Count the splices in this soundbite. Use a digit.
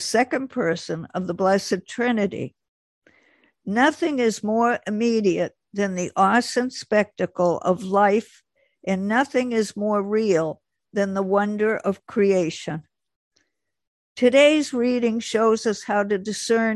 1